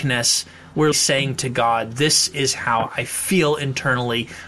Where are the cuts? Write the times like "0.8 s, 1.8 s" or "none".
0.9 s